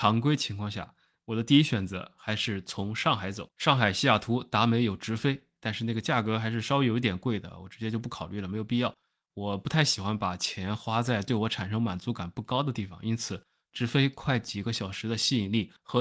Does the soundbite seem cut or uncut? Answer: cut